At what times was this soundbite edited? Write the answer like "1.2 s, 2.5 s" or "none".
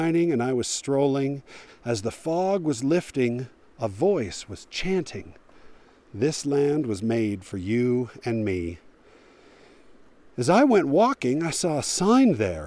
1.7 s